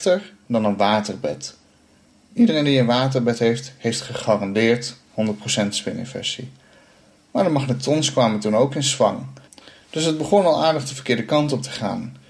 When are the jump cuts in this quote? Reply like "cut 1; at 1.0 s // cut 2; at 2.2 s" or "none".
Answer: none